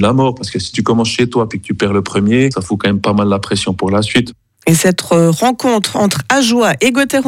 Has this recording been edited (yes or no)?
no